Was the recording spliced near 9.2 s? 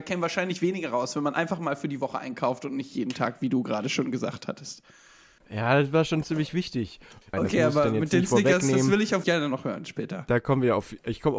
yes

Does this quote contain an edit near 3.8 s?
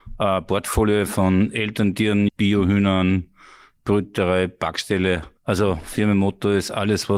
no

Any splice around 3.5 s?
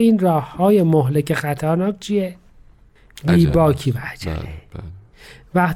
no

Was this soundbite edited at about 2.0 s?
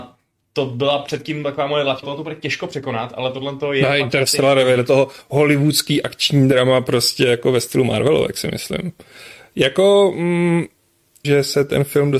yes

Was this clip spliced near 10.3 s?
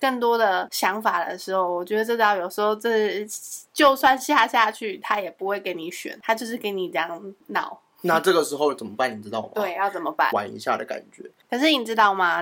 yes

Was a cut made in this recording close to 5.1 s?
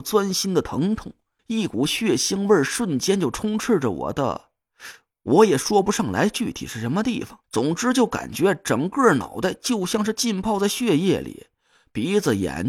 no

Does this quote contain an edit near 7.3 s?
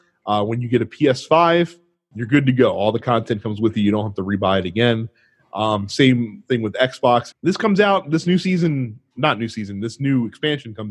yes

